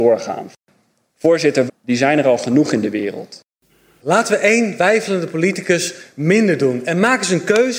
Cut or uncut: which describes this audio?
cut